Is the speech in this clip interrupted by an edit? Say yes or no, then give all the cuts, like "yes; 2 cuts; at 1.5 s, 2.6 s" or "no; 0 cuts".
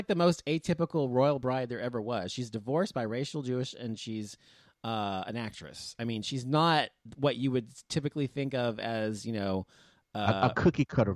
no; 0 cuts